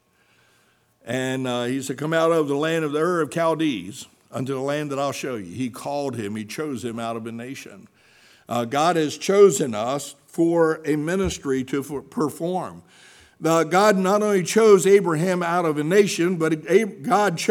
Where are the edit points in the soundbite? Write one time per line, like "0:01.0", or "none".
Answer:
none